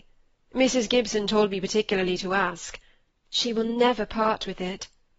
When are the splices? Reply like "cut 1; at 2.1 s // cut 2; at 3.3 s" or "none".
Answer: cut 1; at 3.2 s